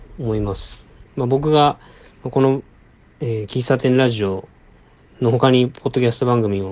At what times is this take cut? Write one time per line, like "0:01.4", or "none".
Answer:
none